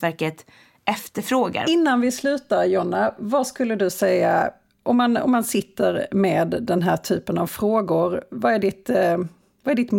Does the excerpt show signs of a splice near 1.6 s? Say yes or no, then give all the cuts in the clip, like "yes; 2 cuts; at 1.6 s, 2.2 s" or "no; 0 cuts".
yes; 1 cut; at 1.6 s